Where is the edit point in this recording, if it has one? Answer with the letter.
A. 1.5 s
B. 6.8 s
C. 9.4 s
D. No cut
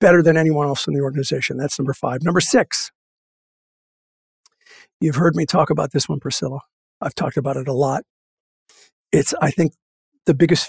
D